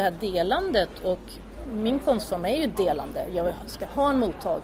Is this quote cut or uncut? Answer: uncut